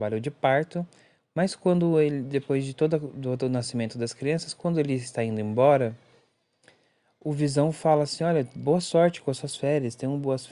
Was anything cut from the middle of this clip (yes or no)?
no